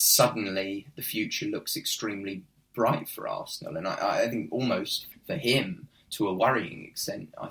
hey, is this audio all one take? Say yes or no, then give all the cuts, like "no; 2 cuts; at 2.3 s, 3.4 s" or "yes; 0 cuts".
no; 1 cut; at 5.1 s